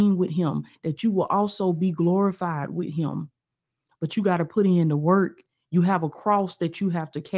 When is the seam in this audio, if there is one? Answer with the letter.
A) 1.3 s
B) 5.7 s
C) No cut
C